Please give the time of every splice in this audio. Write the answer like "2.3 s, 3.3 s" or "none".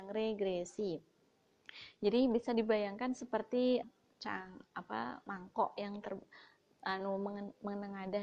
3.8 s